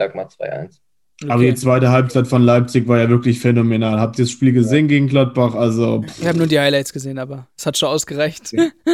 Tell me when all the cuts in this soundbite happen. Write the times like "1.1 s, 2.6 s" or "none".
none